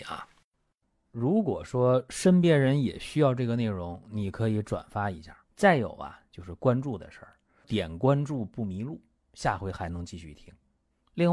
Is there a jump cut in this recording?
yes; 1 cut; at 5.4 s

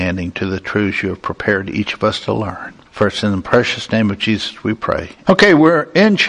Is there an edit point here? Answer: yes; 2 cuts; at 2.9 s, 5.2 s

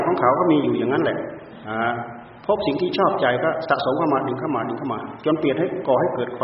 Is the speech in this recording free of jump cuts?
no; 1 cut; at 2.4 s

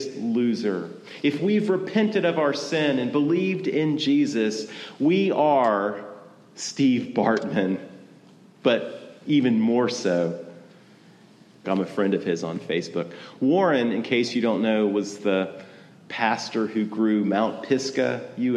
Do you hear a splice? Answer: yes; 2 cuts; at 9.2 s, 11.6 s

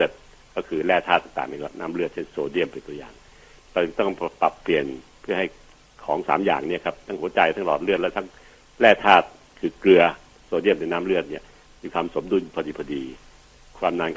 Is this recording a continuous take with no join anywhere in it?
yes; 0 cuts

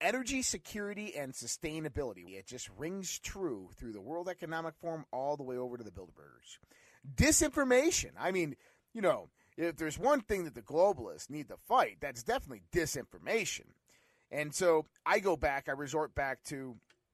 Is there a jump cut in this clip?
yes; 1 cut; at 2.3 s

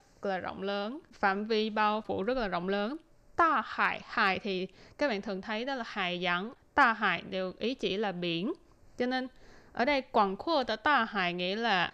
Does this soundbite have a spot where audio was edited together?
no; 0 cuts

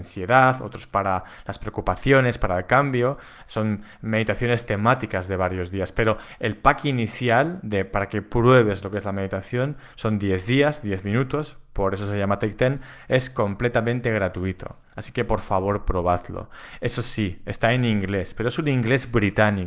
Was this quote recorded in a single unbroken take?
yes; 0 cuts

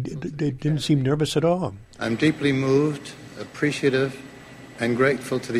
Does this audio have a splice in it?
no; 0 cuts

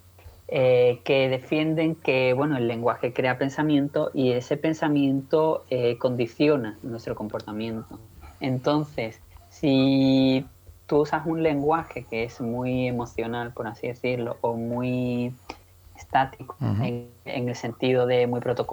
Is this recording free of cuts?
no; 1 cut; at 16.6 s

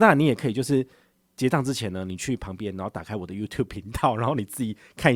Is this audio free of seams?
yes; 0 cuts

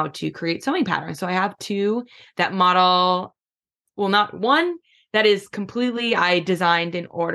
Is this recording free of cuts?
yes; 0 cuts

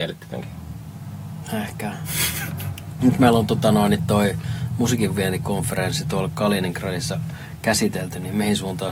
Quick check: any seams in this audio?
yes; 1 cut; at 3.0 s

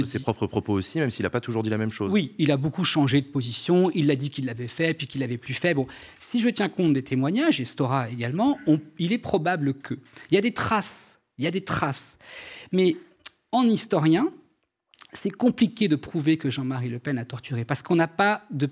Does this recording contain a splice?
no; 0 cuts

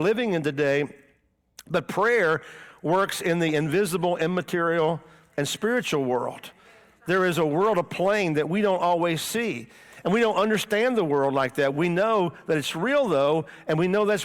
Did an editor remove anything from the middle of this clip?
no; 0 cuts

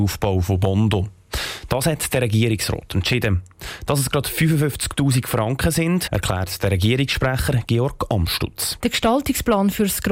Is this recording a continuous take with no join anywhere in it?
no; 2 cuts; at 6.1 s, 8.8 s

